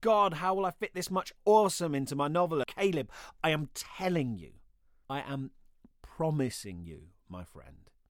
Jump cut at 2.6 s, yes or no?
yes